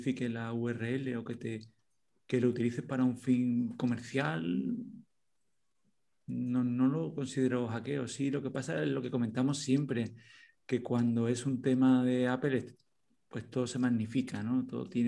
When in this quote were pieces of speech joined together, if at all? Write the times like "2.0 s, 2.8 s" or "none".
none